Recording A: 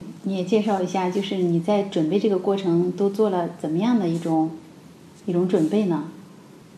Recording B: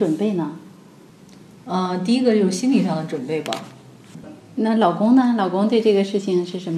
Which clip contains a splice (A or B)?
B